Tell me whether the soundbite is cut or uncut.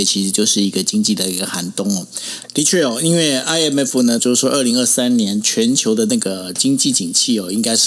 cut